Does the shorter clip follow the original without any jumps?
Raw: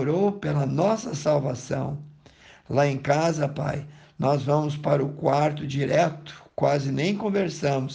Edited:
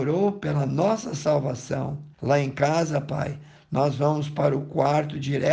no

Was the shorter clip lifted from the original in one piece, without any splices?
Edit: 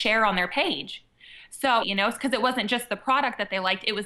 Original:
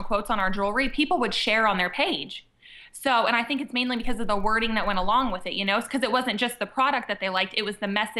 no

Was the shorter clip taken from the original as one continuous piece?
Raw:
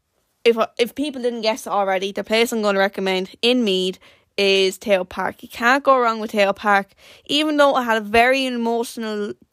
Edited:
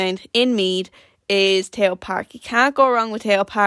yes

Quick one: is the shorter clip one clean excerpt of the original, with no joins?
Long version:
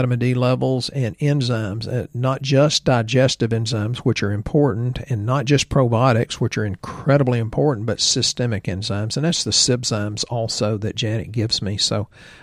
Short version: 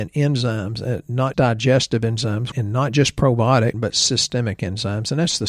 no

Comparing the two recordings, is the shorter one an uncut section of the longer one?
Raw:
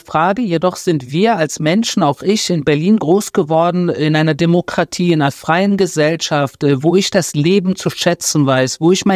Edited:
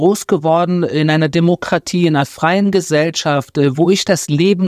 yes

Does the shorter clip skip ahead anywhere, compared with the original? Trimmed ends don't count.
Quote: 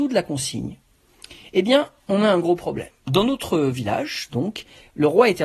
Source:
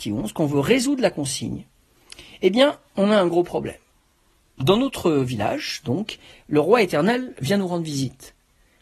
yes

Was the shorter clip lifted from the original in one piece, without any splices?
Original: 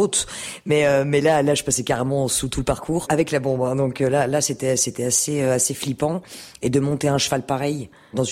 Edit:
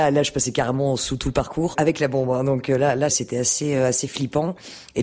no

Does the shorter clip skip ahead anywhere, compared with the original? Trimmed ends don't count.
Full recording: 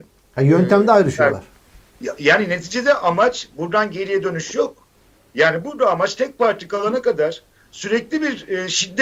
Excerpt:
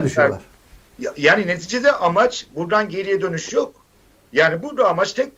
no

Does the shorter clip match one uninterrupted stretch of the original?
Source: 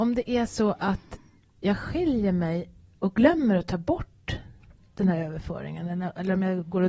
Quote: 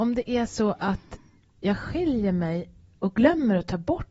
yes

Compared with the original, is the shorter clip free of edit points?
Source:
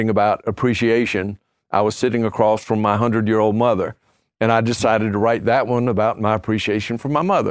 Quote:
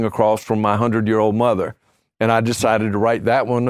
yes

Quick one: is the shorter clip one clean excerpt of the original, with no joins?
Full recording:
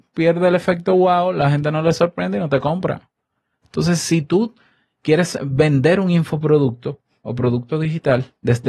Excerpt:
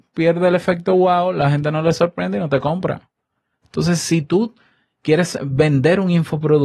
yes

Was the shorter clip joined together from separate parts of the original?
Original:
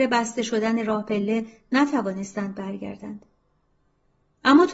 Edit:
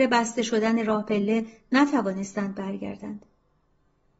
no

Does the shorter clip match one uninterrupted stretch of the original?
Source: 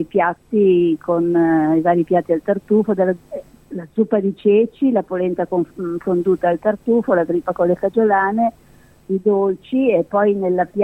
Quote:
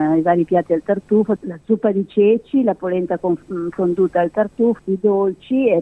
no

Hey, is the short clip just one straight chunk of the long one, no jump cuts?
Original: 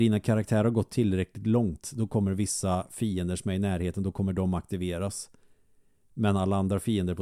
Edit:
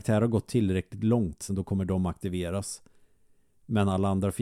no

